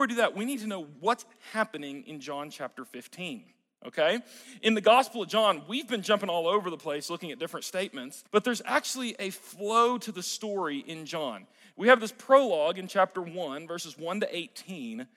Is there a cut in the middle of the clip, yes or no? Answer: yes